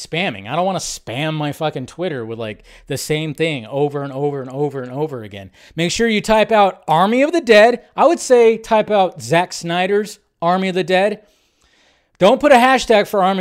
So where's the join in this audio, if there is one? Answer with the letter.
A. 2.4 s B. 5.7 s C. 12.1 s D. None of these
B